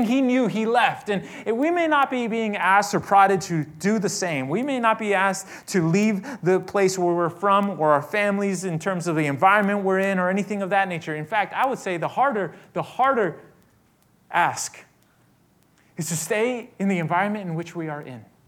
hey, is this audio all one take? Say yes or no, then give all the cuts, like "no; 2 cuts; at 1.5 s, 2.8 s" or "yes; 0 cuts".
yes; 0 cuts